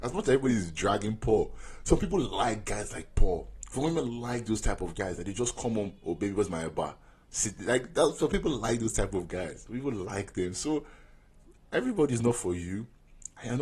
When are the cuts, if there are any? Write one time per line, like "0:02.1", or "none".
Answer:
none